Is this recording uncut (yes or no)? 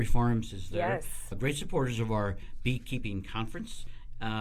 no